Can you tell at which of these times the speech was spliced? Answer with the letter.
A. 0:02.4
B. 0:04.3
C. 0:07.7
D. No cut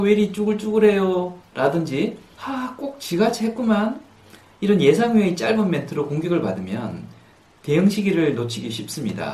A